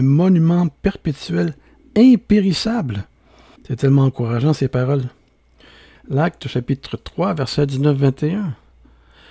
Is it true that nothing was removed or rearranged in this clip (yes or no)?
no